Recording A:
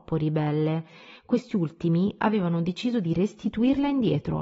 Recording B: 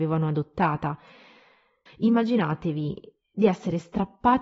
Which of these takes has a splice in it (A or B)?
B